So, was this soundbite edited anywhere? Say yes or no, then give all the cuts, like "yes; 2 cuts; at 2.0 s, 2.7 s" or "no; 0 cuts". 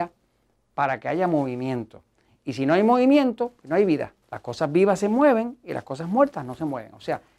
yes; 1 cut; at 4.2 s